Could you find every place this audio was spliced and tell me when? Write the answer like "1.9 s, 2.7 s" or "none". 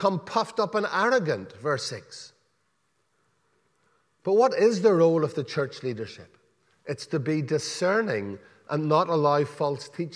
none